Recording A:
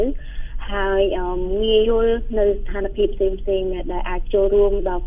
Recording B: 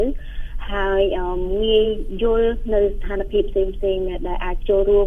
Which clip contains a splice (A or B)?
A